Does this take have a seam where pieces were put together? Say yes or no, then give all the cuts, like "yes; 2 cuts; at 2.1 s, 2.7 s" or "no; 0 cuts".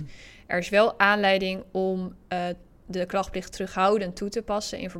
no; 0 cuts